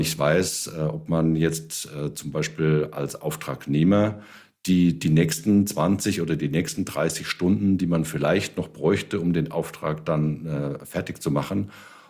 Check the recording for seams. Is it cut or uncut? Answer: uncut